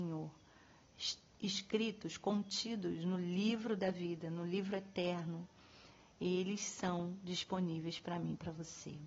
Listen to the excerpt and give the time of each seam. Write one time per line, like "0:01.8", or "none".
none